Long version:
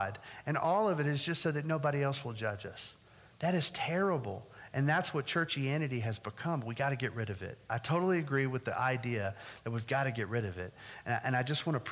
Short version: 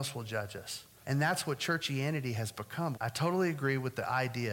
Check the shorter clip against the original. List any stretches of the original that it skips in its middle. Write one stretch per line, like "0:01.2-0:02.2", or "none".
0:03.1-0:04.7
0:06.6-0:07.6